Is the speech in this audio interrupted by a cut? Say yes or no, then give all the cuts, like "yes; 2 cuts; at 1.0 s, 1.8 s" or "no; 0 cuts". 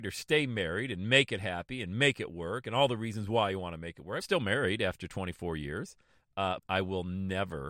yes; 2 cuts; at 4.2 s, 6.6 s